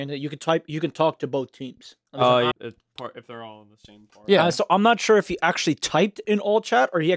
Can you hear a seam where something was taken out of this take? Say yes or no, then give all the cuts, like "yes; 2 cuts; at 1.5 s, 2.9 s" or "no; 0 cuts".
yes; 1 cut; at 2.5 s